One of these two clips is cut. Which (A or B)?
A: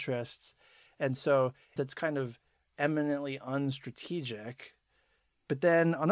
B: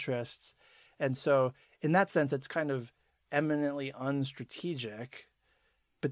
A